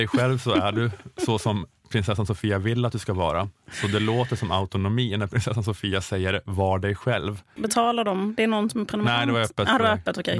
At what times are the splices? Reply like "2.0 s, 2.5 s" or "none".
7.6 s